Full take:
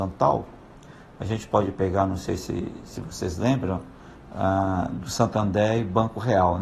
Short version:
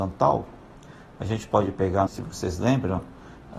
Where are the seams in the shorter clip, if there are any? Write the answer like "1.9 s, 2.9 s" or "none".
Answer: 2.1 s